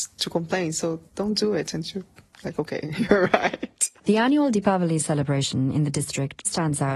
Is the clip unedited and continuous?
no; 1 cut; at 4.0 s

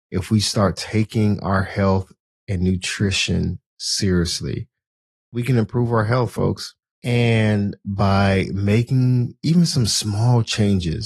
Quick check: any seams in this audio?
no; 0 cuts

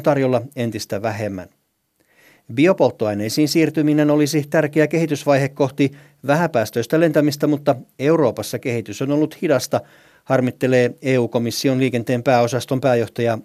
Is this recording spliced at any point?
no; 0 cuts

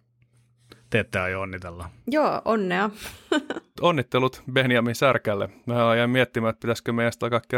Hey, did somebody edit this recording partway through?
yes; 1 cut; at 2.0 s

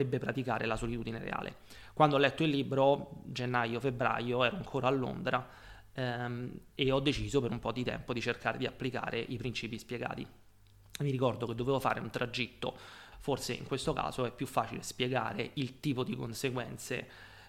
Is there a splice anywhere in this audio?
yes; 1 cut; at 13.1 s

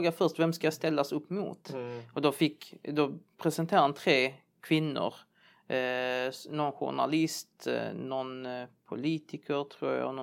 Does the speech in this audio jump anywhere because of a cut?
no; 0 cuts

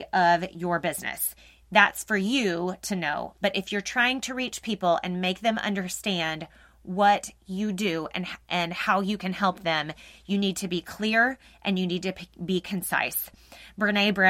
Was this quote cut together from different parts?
no; 0 cuts

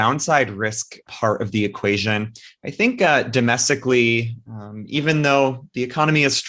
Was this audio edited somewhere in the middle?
no; 0 cuts

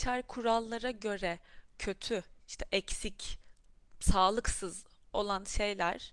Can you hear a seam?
yes; 1 cut; at 2.4 s

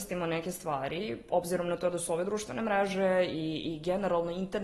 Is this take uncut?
yes; 0 cuts

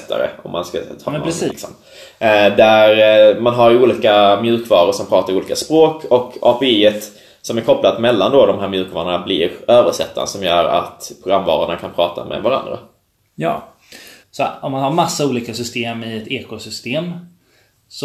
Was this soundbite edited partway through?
yes; 2 cuts; at 1.5 s, 14.2 s

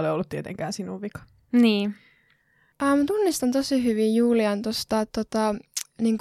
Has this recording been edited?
no; 0 cuts

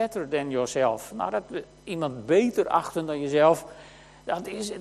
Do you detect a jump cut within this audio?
no; 0 cuts

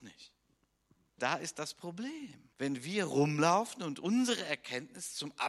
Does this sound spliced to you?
yes; 2 cuts; at 1.2 s, 2.5 s

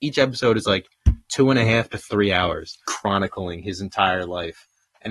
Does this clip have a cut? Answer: yes; 1 cut; at 2.8 s

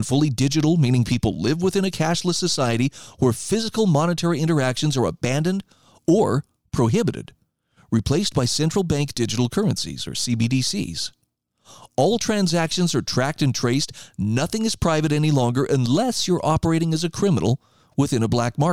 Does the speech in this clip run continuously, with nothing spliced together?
yes; 0 cuts

